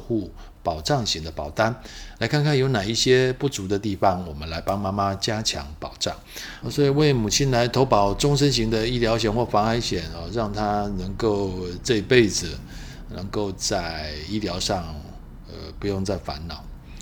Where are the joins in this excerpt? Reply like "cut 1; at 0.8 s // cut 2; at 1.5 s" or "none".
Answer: cut 1; at 6.6 s